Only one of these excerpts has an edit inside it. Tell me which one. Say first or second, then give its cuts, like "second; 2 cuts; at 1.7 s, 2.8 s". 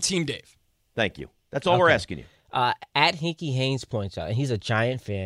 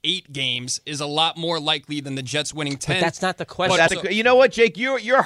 second; 1 cut; at 3.9 s